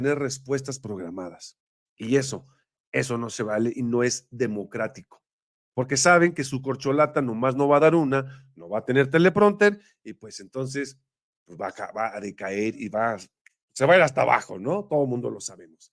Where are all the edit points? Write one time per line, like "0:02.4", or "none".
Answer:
none